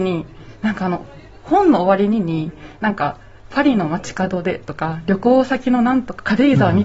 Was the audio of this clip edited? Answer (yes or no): no